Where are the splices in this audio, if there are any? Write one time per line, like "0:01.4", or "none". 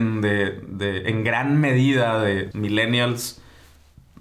0:02.5